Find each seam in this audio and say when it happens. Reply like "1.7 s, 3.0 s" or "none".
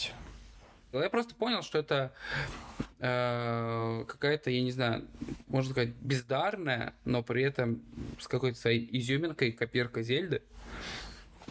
0.9 s